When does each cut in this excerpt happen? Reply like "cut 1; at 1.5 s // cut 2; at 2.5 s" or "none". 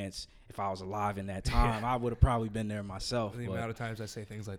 none

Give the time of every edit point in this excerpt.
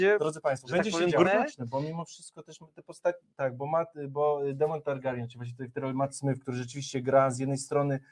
cut 1; at 1.2 s

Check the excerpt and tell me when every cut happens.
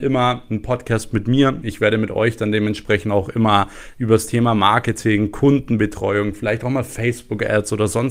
cut 1; at 1.6 s

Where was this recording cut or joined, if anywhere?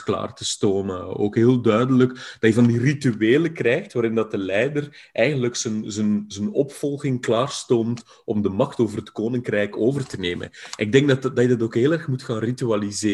none

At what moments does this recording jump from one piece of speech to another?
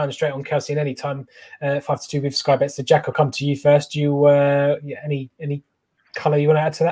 none

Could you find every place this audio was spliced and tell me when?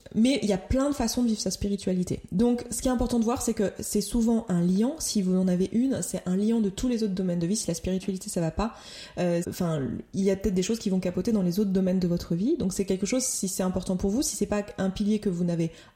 cut 1; at 9.4 s

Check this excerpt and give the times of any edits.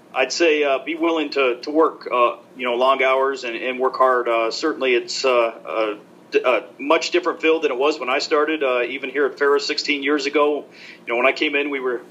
none

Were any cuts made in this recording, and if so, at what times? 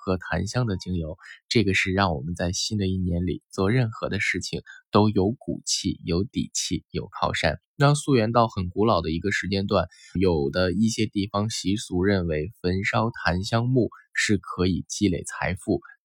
cut 1; at 7.6 s // cut 2; at 10.2 s

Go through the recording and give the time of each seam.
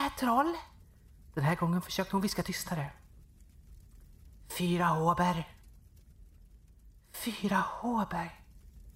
none

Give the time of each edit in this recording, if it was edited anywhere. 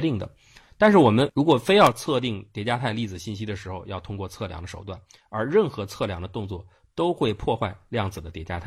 none

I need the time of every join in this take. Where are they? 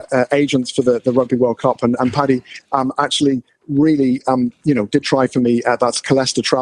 none

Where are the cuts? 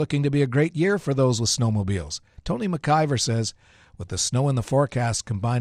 none

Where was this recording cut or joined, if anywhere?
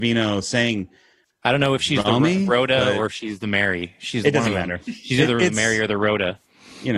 none

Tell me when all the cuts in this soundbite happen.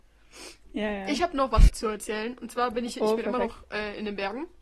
cut 1; at 1.7 s

